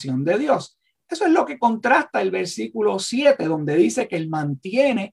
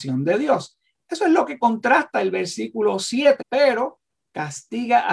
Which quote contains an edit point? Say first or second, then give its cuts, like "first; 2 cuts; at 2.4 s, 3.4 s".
second; 1 cut; at 3.4 s